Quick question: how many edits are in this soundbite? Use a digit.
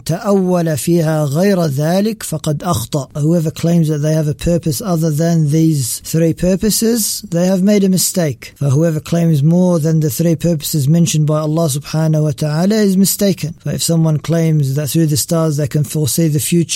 0